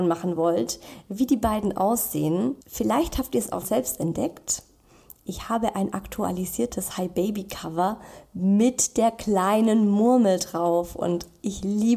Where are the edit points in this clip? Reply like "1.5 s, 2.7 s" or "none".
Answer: 2.6 s, 3.6 s

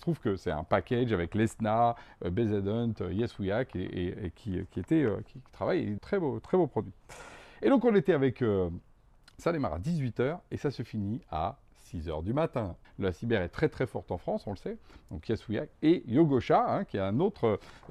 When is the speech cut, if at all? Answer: 6.0 s, 12.8 s

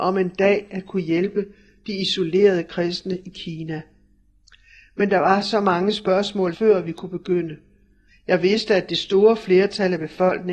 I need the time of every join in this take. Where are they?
6.5 s, 8.1 s

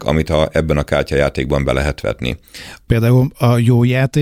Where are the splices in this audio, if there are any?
2.9 s

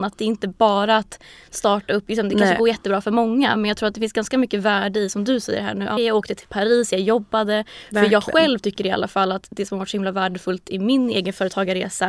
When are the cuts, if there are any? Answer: 6.0 s

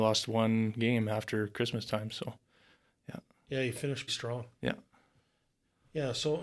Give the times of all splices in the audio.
4.1 s

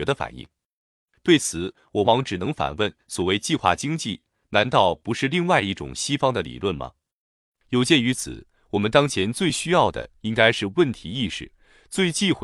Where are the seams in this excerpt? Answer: 2.0 s

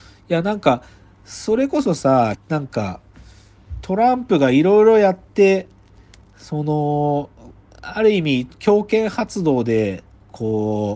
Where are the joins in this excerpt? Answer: 2.3 s

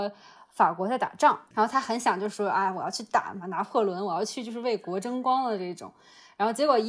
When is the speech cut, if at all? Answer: 1.5 s

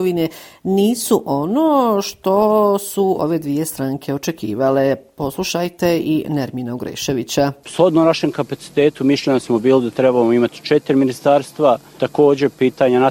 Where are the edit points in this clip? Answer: none

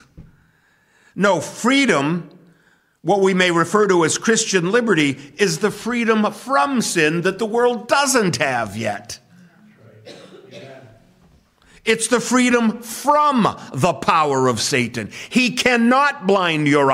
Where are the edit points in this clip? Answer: none

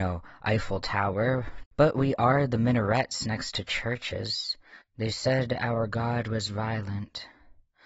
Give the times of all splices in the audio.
1.6 s, 4.8 s

